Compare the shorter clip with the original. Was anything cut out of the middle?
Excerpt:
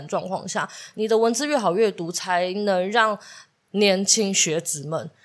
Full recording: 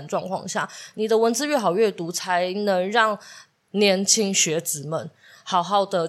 no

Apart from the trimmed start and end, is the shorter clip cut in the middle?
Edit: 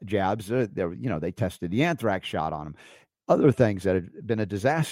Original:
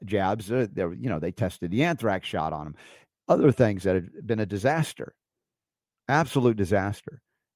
no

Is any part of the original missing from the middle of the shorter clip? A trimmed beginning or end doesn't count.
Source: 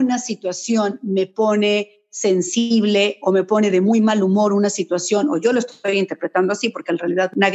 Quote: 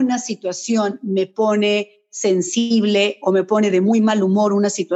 no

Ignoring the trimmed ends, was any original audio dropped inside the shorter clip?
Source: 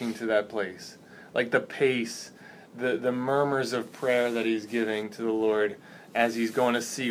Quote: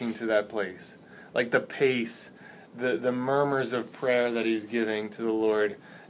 no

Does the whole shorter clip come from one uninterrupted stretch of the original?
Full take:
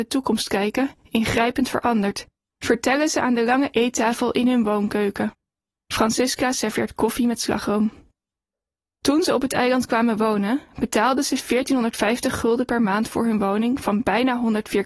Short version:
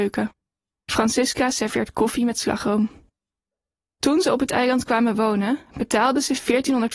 yes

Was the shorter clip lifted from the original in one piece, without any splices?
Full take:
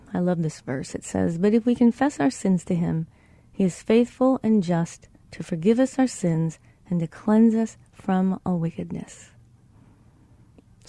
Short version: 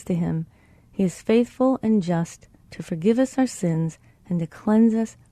yes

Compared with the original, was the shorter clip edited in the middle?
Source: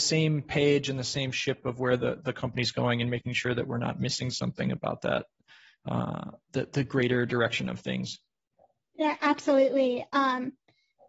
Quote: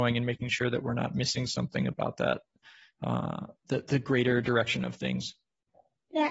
no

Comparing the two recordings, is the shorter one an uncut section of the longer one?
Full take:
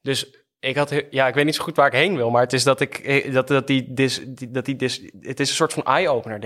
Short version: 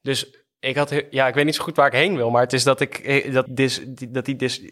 no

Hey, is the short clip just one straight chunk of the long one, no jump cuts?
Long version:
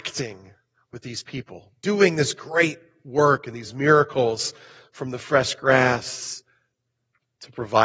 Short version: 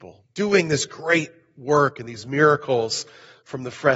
yes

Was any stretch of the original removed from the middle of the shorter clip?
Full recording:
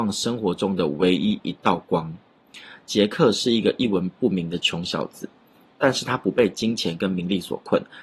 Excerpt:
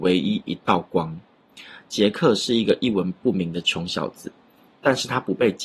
no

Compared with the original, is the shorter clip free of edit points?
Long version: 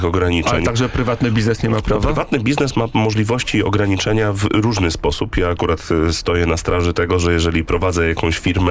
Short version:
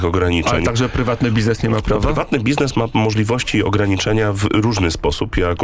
yes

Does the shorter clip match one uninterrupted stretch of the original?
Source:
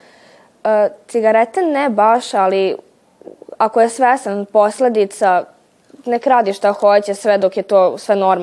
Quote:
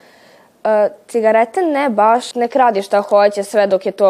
no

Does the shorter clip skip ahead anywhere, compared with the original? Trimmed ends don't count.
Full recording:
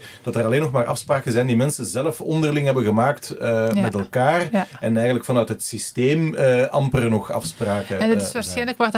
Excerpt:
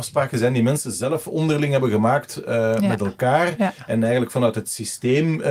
no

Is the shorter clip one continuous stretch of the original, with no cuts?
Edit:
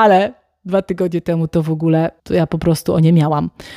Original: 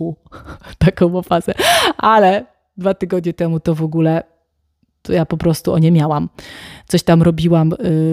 no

